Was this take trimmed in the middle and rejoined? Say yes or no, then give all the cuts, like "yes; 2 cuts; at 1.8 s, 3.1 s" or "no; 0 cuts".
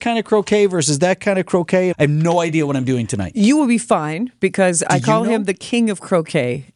yes; 1 cut; at 1.9 s